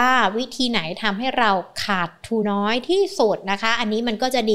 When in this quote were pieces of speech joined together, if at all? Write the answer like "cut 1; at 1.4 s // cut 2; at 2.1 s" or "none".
cut 1; at 2.4 s